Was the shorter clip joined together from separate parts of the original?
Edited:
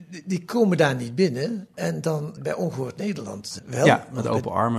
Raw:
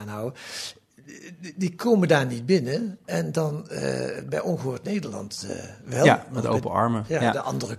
yes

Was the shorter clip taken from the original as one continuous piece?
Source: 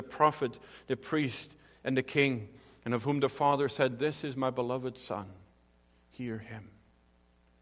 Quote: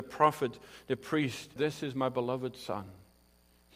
no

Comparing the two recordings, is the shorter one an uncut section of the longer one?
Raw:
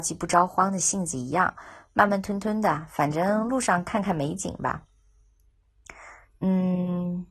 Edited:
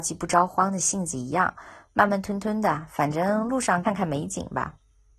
no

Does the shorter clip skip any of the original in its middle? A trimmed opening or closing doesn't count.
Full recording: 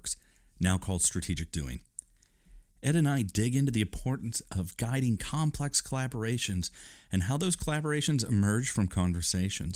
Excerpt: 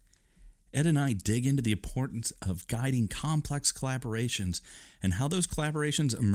no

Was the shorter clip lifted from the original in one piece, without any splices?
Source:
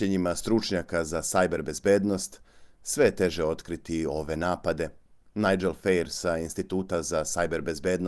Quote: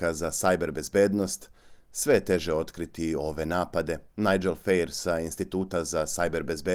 no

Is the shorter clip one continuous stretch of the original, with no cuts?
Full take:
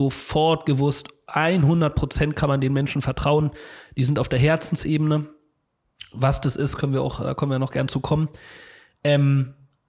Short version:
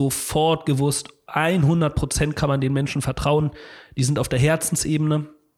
yes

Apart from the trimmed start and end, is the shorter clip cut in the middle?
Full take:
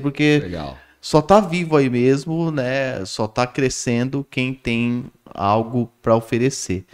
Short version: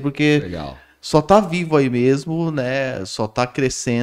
no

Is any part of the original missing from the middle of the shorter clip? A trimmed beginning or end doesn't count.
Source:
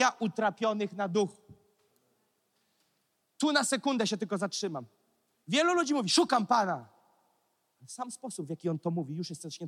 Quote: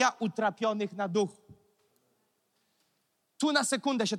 no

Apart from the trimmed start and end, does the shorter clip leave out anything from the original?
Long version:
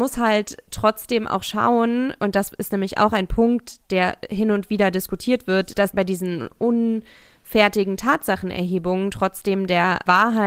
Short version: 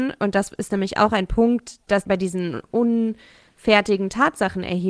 yes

